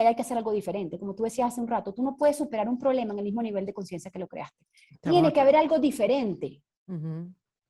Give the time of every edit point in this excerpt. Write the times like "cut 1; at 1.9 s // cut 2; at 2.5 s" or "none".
none